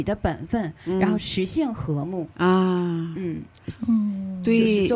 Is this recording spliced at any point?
yes; 1 cut; at 3.7 s

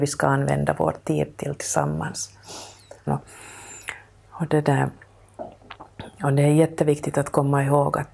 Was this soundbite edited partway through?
yes; 1 cut; at 3.1 s

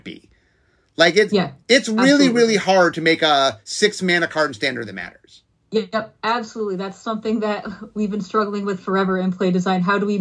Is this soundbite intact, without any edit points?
yes; 0 cuts

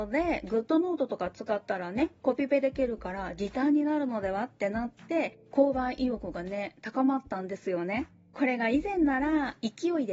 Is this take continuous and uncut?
yes; 0 cuts

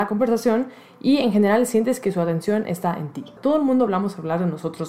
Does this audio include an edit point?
yes; 1 cut; at 3.4 s

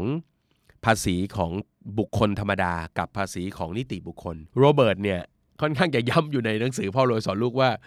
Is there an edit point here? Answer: yes; 2 cuts; at 2.1 s, 4.5 s

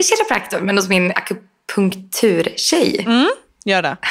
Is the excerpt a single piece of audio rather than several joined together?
no; 1 cut; at 1.1 s

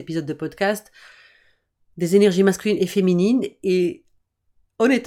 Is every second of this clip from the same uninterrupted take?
yes; 0 cuts

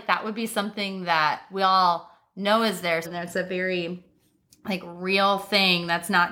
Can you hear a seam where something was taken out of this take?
yes; 1 cut; at 3.0 s

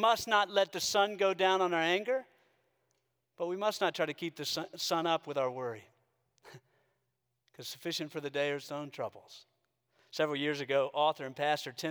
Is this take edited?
no; 0 cuts

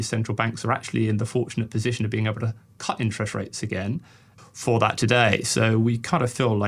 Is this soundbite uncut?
no; 1 cut; at 4.4 s

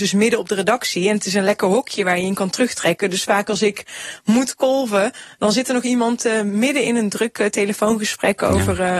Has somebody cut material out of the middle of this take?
no; 0 cuts

